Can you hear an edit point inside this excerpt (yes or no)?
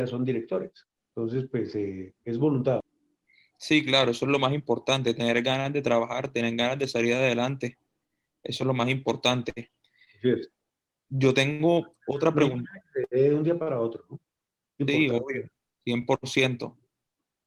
no